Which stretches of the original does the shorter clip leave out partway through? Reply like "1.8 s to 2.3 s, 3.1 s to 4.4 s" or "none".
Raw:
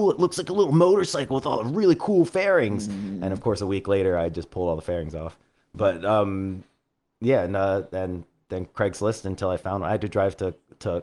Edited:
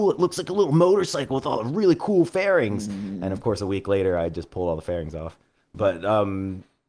none